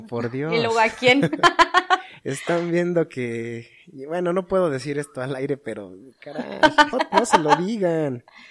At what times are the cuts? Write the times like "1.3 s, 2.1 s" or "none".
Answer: 6.9 s